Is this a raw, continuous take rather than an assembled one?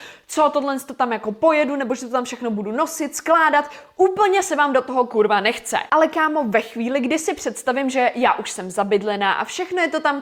yes; 0 cuts

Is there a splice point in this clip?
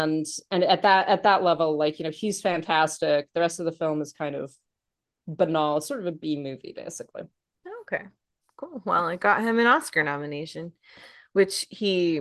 no; 0 cuts

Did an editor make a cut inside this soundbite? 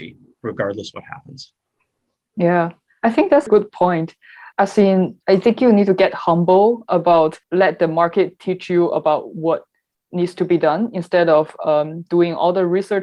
yes; 1 cut; at 3.5 s

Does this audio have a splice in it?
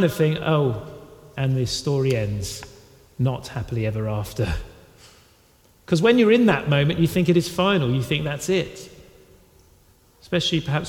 no; 0 cuts

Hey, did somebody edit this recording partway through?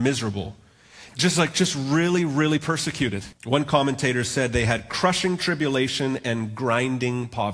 yes; 2 cuts; at 1.1 s, 3.3 s

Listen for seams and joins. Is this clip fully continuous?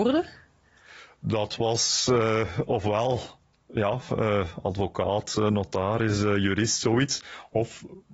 yes; 0 cuts

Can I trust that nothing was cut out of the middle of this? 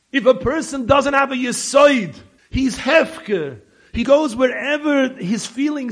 no; 2 cuts; at 2.4 s, 4.0 s

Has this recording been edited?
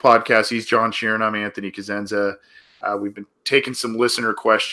no; 0 cuts

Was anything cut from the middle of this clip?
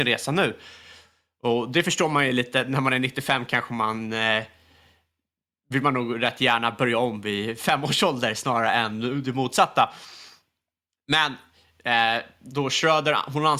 no; 0 cuts

